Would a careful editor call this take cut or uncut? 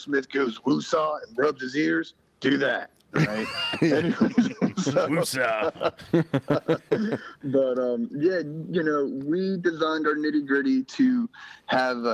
uncut